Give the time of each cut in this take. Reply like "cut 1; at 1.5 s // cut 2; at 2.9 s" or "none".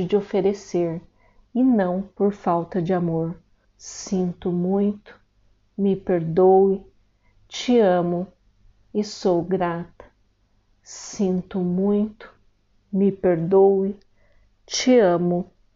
cut 1; at 3.6 s